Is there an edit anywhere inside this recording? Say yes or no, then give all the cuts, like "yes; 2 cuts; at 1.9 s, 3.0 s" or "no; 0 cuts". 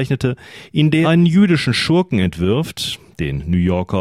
yes; 1 cut; at 1.0 s